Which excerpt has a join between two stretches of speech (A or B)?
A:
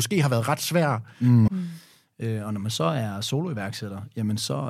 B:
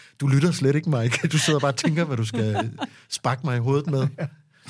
A